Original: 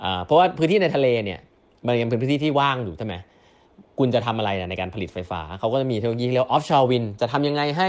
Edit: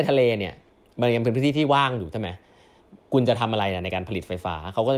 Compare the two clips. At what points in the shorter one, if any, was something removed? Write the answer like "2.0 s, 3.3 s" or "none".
none